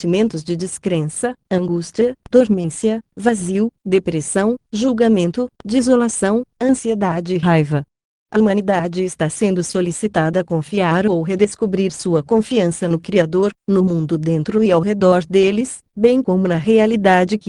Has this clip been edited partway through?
no; 0 cuts

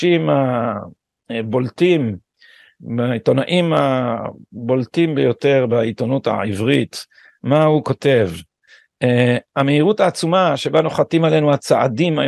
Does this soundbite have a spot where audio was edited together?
no; 0 cuts

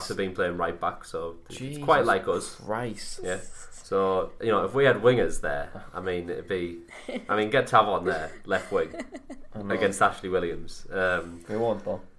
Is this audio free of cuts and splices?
yes; 0 cuts

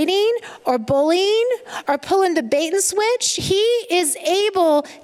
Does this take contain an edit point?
yes; 1 cut; at 3.4 s

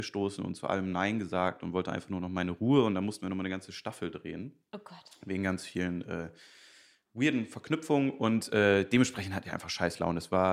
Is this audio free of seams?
yes; 0 cuts

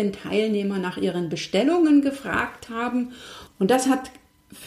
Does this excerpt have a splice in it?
yes; 1 cut; at 3.5 s

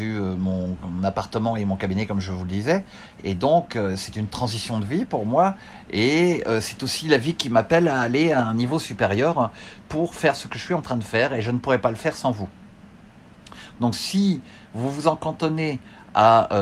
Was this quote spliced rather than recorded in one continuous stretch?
no; 0 cuts

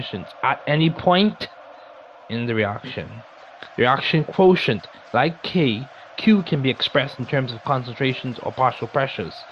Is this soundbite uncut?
yes; 0 cuts

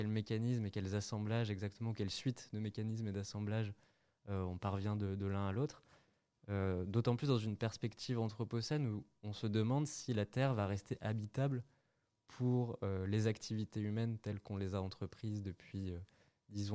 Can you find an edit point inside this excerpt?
no; 0 cuts

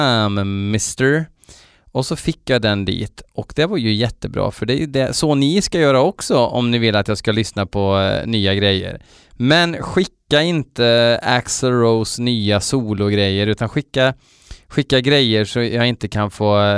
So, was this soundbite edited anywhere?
no; 0 cuts

